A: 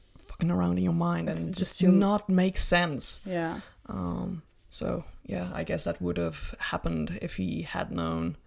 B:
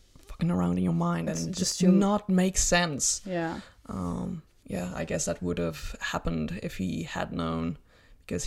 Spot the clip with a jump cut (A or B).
B